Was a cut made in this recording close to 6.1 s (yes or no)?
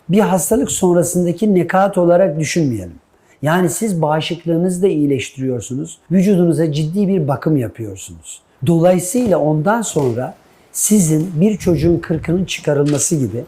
yes